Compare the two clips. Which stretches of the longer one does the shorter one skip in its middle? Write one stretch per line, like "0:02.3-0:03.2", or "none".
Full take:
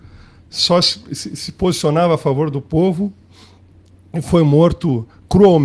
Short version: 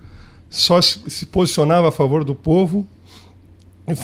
0:01.0-0:01.3